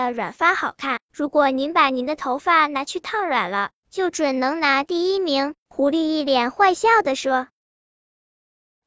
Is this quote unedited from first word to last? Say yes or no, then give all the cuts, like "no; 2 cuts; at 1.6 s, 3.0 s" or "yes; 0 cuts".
yes; 0 cuts